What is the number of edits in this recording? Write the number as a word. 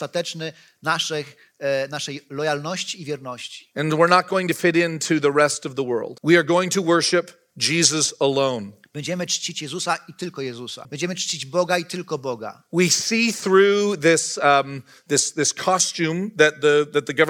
two